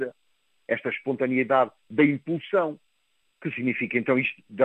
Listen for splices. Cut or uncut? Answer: cut